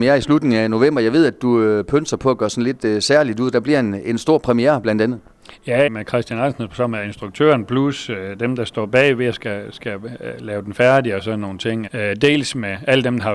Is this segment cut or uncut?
cut